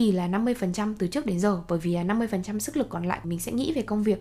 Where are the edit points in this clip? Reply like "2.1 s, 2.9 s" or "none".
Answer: 3.2 s